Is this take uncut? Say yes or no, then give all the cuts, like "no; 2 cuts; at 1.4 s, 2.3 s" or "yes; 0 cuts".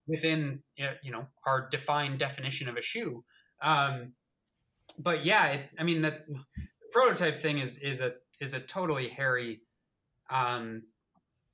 yes; 0 cuts